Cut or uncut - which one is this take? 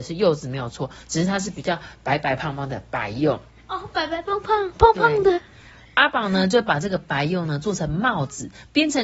uncut